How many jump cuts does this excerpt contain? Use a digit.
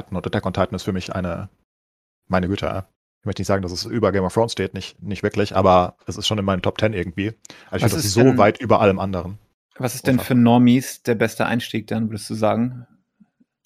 0